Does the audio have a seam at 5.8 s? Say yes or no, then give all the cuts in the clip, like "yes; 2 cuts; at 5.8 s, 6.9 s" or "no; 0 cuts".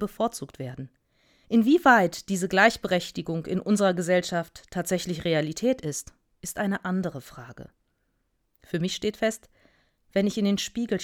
no; 1 cut; at 1.4 s